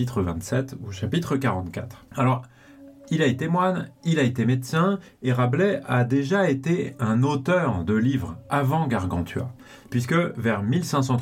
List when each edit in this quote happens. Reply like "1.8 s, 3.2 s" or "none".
2.1 s

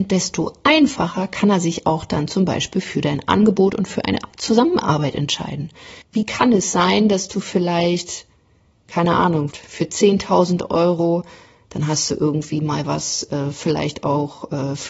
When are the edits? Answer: 6.0 s, 9.5 s

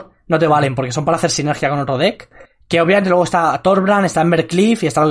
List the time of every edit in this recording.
none

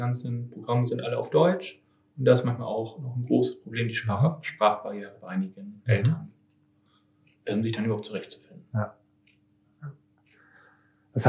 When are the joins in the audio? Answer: none

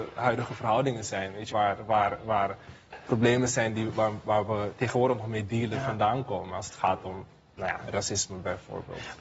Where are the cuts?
1.5 s

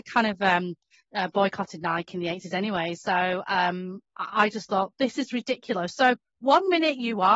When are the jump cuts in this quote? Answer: none

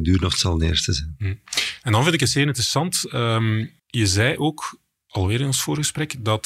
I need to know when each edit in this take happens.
3.8 s

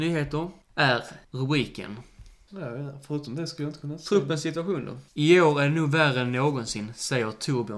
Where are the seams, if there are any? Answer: 2.5 s, 5.1 s

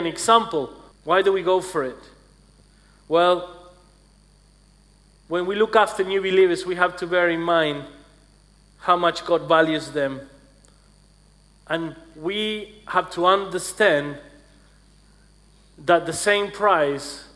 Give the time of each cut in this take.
0.9 s

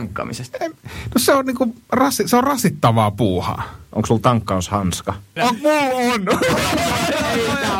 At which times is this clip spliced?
5.4 s

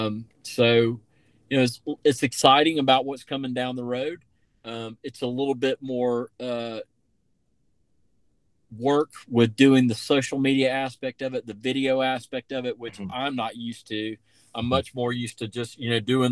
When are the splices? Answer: none

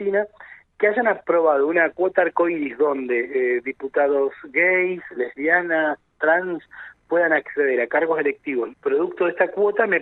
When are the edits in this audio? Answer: 5.1 s, 8.7 s

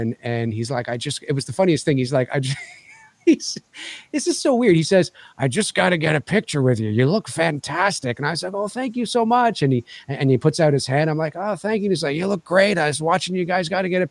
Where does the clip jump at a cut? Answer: none

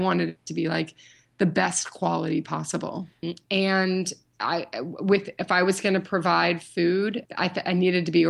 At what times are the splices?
3.2 s, 7.3 s

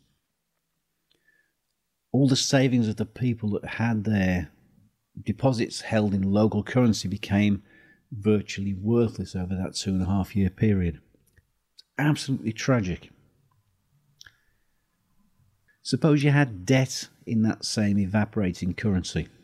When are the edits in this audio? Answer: 15.7 s

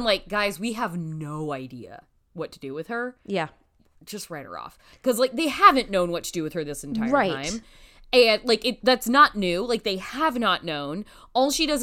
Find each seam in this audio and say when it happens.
none

